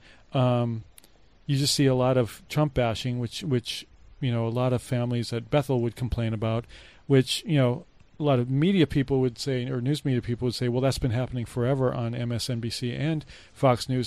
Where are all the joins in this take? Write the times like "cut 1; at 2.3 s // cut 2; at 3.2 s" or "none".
none